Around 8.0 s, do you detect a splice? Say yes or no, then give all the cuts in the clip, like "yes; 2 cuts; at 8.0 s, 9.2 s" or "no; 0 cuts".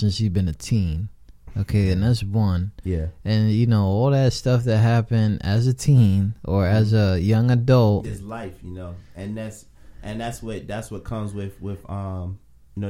yes; 1 cut; at 8.0 s